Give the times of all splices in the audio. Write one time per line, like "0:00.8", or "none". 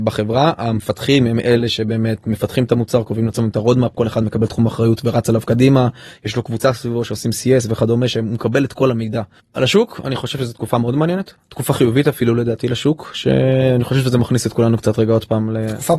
0:09.4